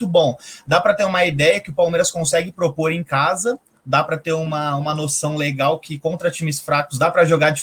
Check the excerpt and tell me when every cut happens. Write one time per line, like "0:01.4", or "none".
none